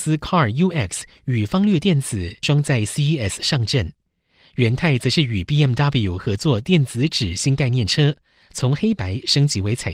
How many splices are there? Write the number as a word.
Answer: one